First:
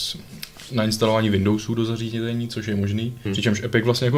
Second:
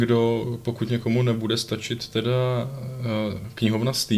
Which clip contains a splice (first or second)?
first